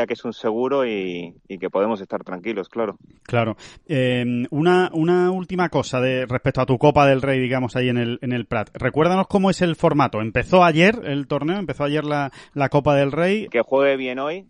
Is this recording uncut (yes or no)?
no